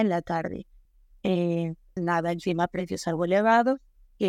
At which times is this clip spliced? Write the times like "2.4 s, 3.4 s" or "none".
2.0 s